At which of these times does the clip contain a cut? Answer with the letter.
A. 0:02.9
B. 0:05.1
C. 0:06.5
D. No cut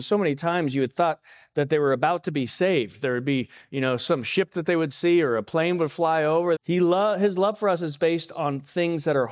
C